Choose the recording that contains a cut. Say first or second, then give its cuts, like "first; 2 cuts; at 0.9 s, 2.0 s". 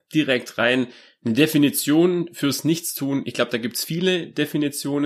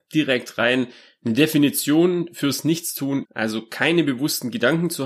second; 1 cut; at 3.2 s